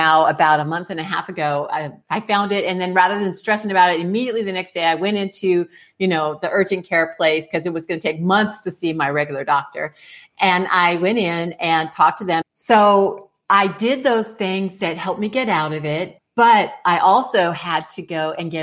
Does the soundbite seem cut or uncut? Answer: cut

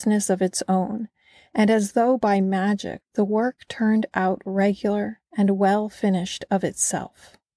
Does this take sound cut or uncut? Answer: cut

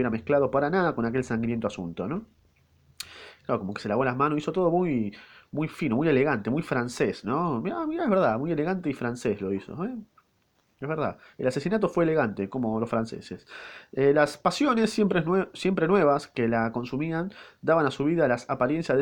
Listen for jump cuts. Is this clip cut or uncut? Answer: uncut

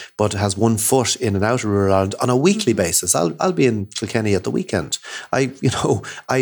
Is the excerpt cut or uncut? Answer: uncut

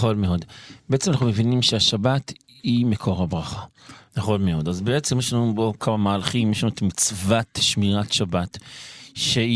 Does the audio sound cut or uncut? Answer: cut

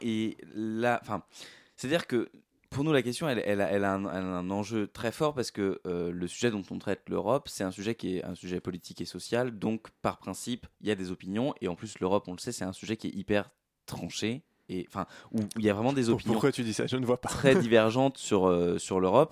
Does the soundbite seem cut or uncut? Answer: uncut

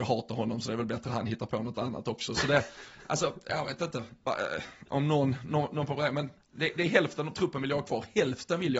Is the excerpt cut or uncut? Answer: uncut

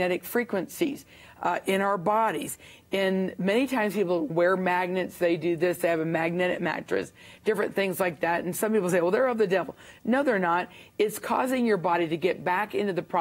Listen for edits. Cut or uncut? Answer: uncut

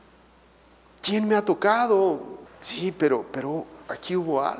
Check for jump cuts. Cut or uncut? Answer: cut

